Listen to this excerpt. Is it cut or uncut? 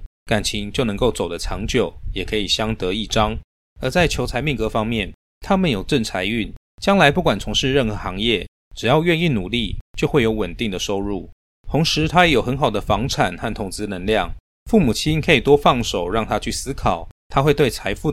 uncut